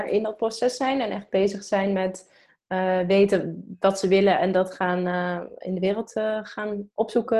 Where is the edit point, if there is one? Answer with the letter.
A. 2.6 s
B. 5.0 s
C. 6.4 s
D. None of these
D